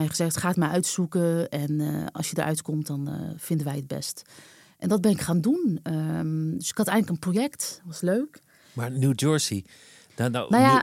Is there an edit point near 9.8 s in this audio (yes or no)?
no